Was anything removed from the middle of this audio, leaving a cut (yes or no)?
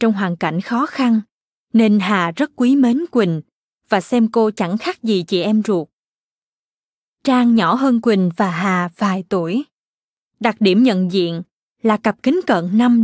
yes